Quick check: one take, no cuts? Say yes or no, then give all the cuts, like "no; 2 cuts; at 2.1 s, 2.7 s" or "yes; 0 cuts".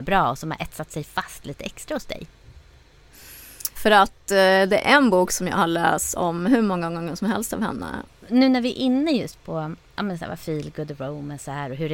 no; 2 cuts; at 3.8 s, 8.1 s